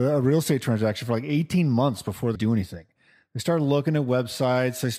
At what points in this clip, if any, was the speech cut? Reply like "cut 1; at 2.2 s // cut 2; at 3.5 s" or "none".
cut 1; at 2.3 s